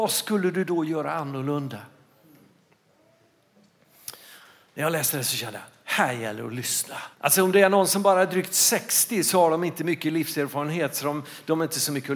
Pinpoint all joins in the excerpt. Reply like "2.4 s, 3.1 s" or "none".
7.1 s